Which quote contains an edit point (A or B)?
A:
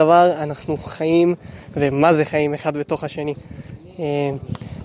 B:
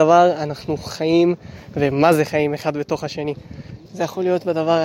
B